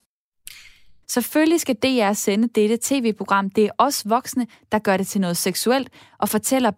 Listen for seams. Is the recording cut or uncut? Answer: cut